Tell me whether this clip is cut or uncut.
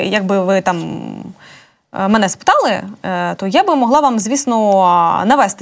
uncut